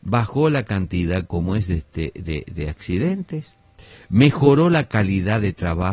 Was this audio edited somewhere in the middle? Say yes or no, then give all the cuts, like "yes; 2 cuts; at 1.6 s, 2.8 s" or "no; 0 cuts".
no; 0 cuts